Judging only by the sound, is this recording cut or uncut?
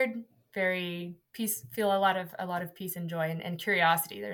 uncut